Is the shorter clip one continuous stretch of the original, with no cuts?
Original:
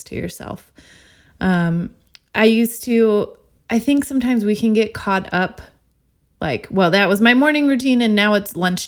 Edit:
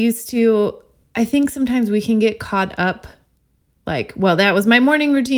yes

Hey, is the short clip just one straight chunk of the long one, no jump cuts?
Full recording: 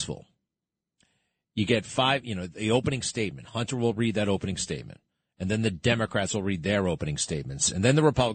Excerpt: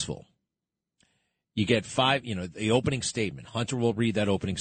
yes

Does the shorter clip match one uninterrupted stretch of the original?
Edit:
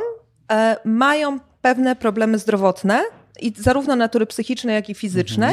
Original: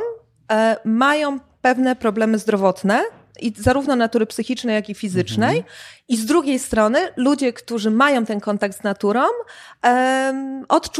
yes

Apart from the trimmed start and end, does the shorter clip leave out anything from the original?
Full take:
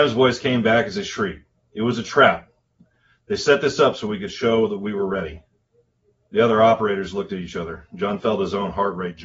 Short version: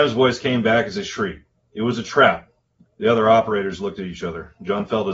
yes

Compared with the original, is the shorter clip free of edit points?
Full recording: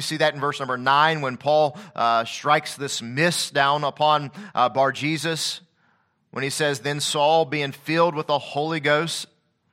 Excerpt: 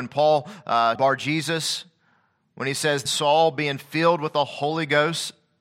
no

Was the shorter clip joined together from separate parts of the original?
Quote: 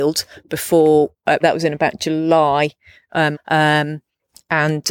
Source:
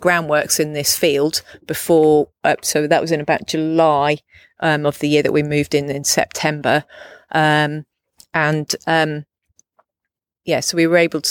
yes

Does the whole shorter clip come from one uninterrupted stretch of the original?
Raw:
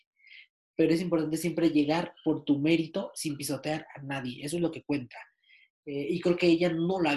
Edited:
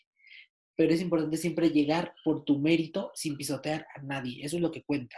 yes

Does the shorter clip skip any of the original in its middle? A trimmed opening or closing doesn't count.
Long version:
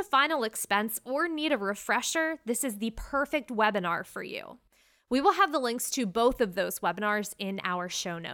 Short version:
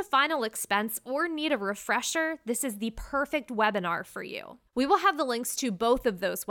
yes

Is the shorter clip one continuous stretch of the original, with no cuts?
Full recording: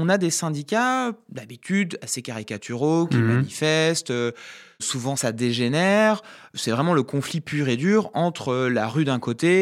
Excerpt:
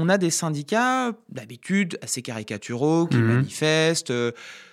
yes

